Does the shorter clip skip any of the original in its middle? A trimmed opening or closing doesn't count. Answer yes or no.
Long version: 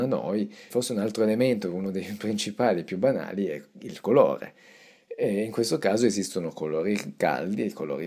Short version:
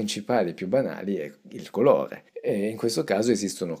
yes